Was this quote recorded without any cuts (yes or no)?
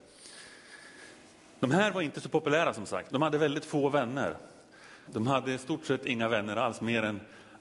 no